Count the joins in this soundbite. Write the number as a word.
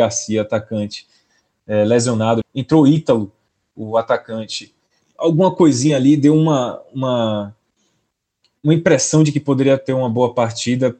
two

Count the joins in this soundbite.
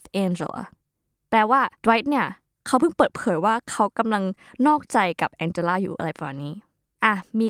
one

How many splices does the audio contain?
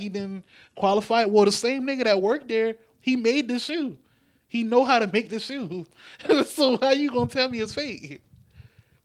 zero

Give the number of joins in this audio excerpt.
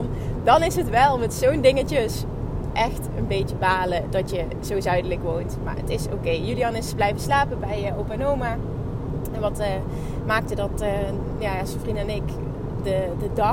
zero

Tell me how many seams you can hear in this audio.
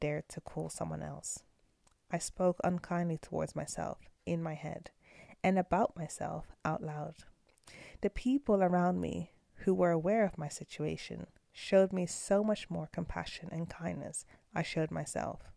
zero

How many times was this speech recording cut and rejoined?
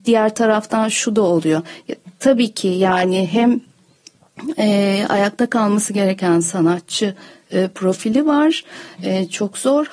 zero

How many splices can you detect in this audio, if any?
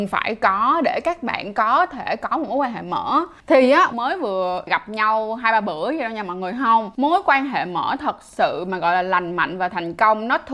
one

